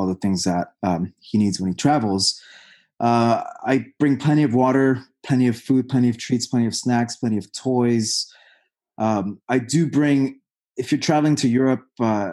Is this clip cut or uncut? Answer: uncut